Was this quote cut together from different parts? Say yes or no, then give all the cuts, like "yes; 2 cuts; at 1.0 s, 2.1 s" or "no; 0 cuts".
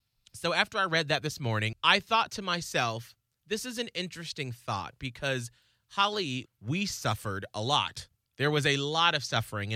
yes; 3 cuts; at 1.7 s, 6.5 s, 8.3 s